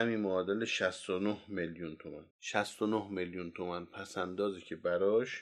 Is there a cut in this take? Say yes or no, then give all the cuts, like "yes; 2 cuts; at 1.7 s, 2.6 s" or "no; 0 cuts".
yes; 1 cut; at 2.3 s